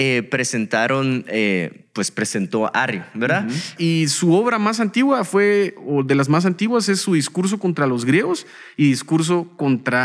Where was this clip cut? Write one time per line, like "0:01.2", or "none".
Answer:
0:03.8